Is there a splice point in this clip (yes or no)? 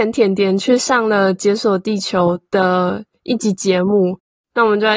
no